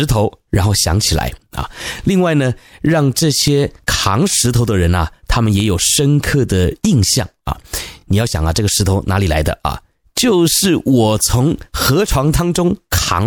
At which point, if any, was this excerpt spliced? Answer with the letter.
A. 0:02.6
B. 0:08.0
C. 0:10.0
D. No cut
D